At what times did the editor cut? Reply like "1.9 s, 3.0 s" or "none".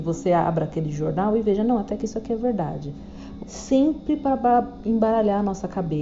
3.4 s